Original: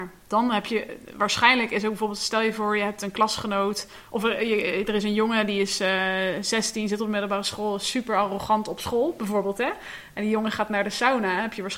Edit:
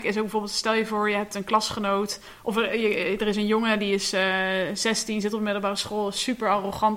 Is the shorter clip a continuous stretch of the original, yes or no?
yes